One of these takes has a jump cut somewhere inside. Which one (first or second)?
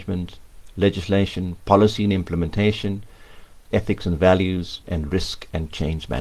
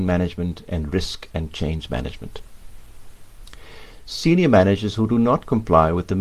first